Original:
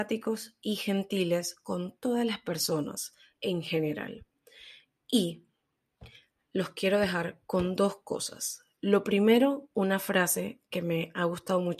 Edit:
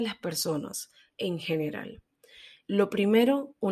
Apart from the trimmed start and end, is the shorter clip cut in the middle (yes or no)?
yes